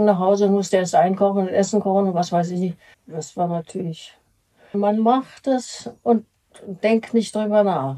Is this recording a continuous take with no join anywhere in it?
no; 2 cuts; at 2.9 s, 4.7 s

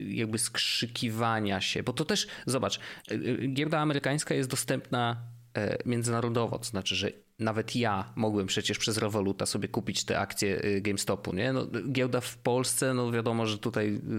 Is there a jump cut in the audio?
no; 0 cuts

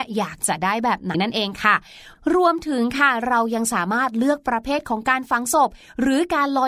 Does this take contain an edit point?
yes; 1 cut; at 1.1 s

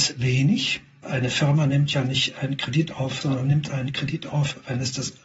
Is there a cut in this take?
yes; 2 cuts; at 1.0 s, 3.2 s

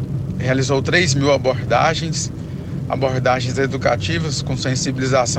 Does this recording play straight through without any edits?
yes; 0 cuts

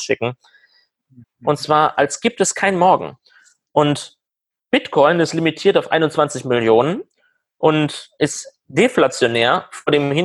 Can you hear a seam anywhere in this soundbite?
yes; 1 cut; at 1.2 s

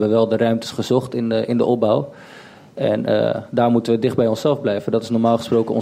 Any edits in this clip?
no; 0 cuts

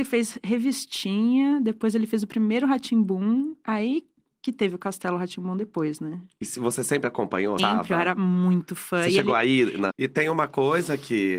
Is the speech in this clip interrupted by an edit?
yes; 2 cuts; at 7.6 s, 9.9 s

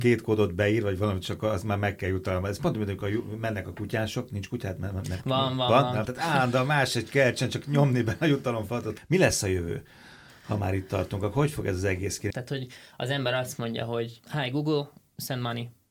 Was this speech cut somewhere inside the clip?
yes; 2 cuts; at 6.1 s, 12.3 s

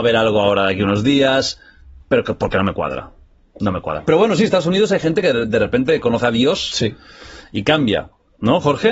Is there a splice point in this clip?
no; 0 cuts

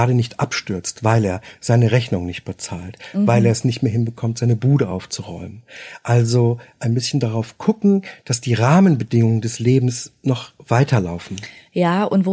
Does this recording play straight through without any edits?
yes; 0 cuts

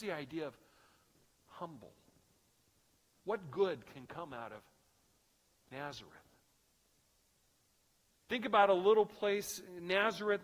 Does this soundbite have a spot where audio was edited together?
yes; 1 cut; at 8.2 s

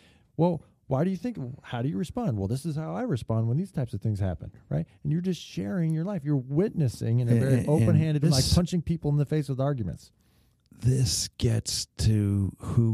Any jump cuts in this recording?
yes; 1 cut; at 8.2 s

